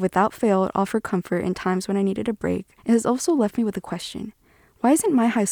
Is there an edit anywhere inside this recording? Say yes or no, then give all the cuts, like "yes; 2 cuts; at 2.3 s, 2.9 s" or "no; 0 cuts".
yes; 1 cut; at 2.8 s